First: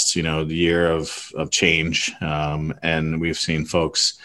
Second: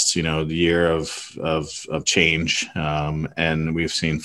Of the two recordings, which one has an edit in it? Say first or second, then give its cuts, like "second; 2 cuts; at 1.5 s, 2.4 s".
first; 1 cut; at 1.3 s